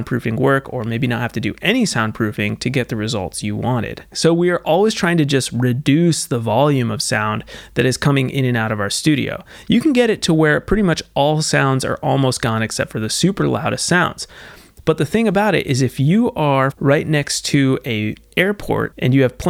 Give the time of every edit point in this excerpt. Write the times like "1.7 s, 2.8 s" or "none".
4.1 s, 16.7 s